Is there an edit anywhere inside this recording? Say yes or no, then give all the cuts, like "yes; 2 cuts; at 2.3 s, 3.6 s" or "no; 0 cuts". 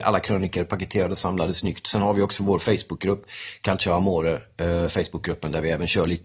no; 0 cuts